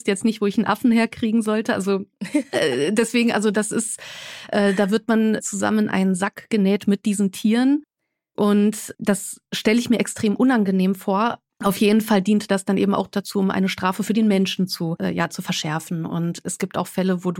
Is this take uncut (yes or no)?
no